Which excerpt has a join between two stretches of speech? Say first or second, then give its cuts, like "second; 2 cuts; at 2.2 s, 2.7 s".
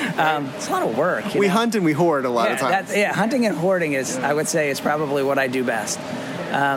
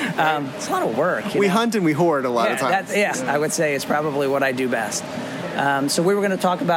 second; 1 cut; at 3.1 s